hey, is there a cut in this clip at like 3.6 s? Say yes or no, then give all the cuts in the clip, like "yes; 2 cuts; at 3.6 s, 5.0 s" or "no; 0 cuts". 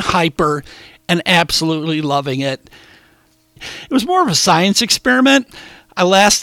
yes; 1 cut; at 3.6 s